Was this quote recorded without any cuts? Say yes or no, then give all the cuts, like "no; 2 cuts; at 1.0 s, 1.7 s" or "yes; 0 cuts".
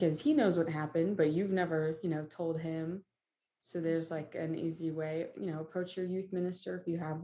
no; 1 cut; at 5.3 s